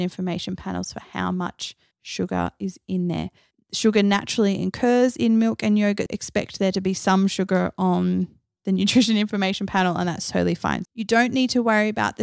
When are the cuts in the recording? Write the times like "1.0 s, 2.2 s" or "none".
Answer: 6.1 s, 10.9 s